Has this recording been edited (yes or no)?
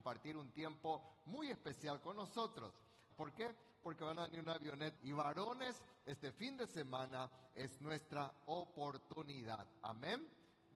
yes